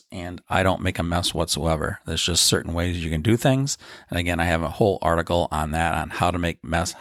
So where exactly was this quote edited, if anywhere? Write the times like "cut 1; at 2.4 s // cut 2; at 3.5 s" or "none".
none